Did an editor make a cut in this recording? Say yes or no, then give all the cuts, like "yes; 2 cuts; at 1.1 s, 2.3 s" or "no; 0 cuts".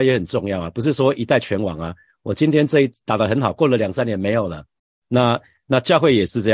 no; 0 cuts